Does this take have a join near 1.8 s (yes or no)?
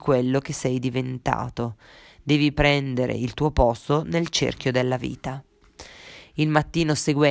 no